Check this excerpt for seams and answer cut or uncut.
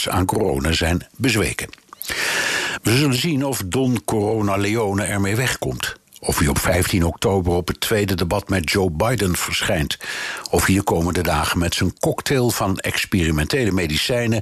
uncut